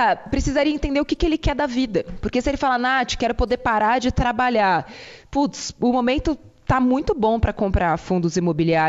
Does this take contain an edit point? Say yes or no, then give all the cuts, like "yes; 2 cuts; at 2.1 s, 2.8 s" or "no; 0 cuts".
no; 0 cuts